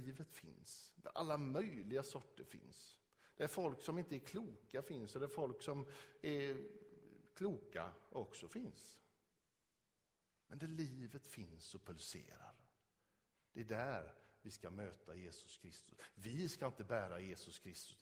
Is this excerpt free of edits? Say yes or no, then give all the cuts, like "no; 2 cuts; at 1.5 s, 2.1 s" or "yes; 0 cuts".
yes; 0 cuts